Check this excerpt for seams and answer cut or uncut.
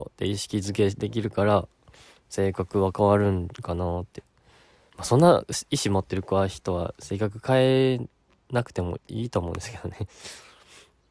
cut